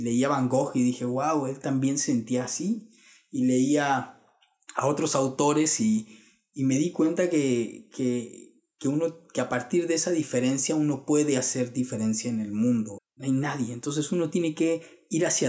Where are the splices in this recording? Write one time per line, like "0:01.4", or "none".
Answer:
0:13.0